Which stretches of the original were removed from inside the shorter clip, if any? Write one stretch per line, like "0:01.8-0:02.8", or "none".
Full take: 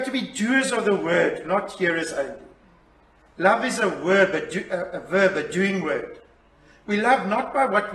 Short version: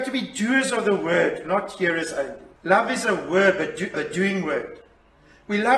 0:02.6-0:03.3
0:04.7-0:05.3